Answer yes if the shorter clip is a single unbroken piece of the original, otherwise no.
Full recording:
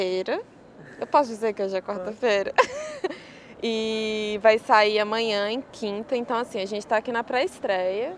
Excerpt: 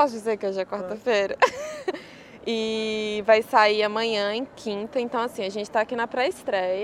yes